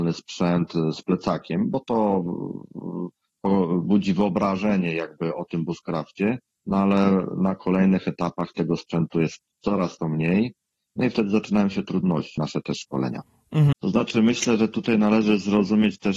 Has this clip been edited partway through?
yes; 2 cuts; at 12.4 s, 13.7 s

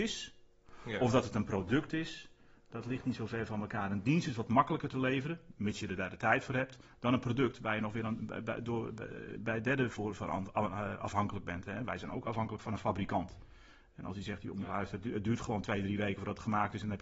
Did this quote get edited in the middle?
no; 0 cuts

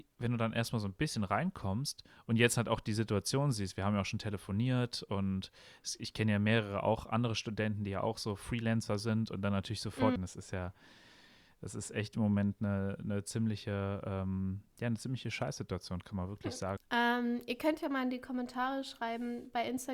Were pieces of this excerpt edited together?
yes; 2 cuts; at 10.2 s, 16.8 s

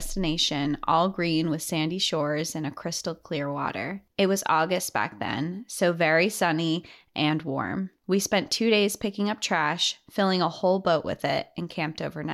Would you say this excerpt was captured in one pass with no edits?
yes; 0 cuts

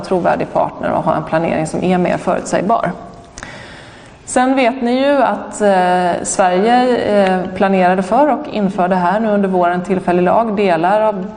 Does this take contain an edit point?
no; 0 cuts

